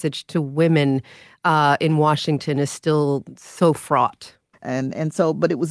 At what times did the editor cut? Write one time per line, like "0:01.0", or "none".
0:04.5